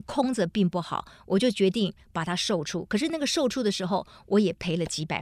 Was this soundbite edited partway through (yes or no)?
no